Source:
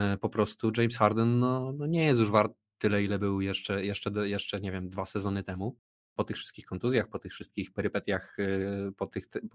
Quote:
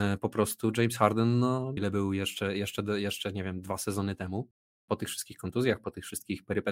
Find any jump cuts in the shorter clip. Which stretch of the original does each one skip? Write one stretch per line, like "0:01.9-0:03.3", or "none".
0:01.8-0:03.1